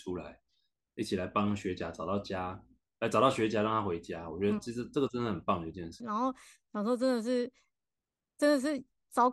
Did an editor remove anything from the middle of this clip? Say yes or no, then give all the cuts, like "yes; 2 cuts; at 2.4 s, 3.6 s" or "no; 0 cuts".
yes; 1 cut; at 6.0 s